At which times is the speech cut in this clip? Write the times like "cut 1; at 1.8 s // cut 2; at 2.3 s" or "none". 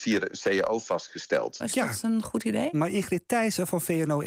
cut 1; at 1.6 s // cut 2; at 2.7 s